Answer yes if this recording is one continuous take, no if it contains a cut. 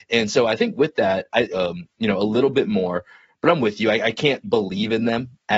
no